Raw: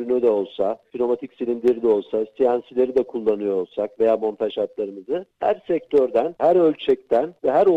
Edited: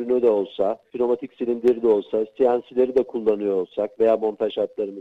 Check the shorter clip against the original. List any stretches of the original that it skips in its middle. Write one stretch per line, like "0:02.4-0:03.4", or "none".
none